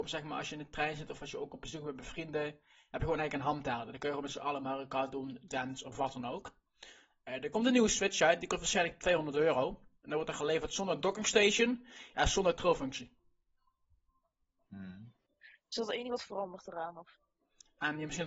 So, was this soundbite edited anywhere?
yes; 1 cut; at 5.5 s

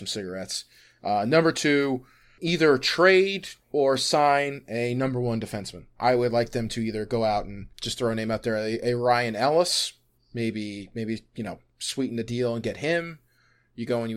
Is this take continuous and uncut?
no; 3 cuts; at 2.4 s, 6.0 s, 7.7 s

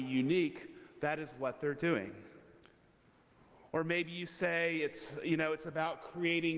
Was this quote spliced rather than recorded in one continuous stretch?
no; 0 cuts

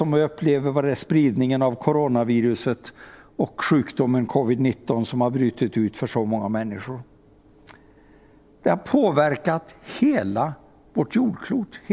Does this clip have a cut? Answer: no; 0 cuts

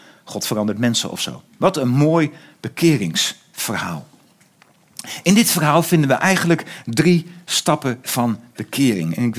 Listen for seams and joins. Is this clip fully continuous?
no; 1 cut; at 1.5 s

